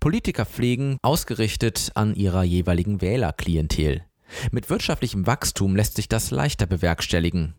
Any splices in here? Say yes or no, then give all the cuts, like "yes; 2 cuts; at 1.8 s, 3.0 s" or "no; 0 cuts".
yes; 1 cut; at 1.0 s